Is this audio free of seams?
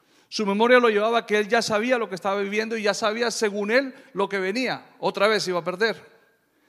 yes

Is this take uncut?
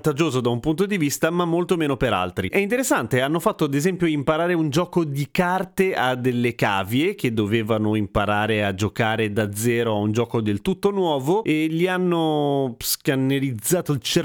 no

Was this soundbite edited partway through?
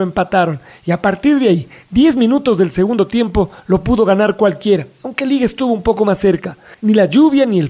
yes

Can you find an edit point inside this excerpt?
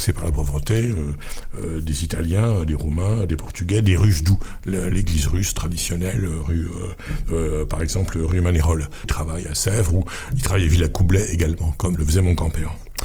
yes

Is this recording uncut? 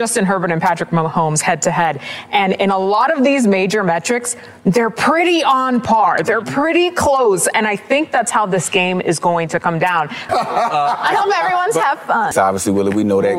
no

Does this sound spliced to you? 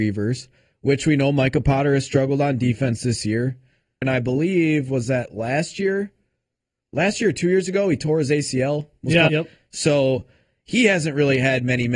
yes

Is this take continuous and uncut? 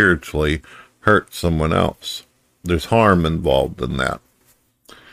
yes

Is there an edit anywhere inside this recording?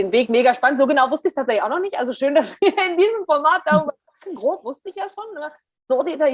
no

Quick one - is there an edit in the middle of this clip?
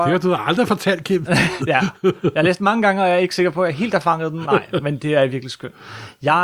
yes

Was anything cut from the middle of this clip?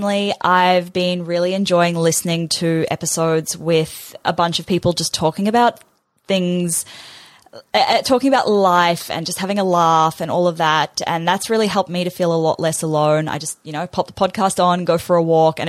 no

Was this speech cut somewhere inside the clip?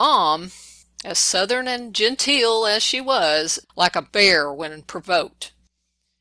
yes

